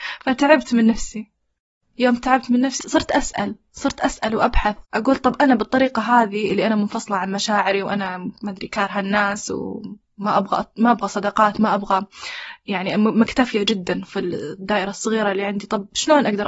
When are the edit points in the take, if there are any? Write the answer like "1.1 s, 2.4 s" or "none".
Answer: 2.8 s, 4.8 s